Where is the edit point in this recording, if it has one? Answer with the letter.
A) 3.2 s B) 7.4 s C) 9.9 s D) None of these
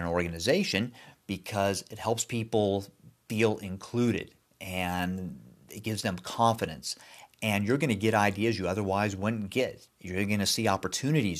C